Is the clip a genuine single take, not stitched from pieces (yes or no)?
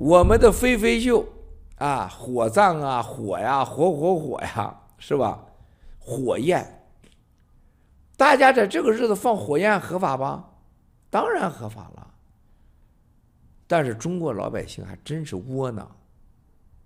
yes